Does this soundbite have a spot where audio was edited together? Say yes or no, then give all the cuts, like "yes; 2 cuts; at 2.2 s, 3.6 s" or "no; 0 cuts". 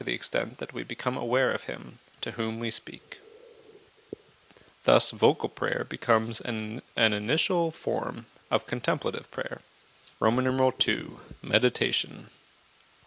yes; 1 cut; at 10.1 s